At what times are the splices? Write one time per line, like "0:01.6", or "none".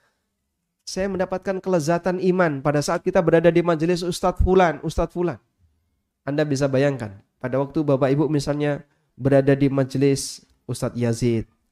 0:06.1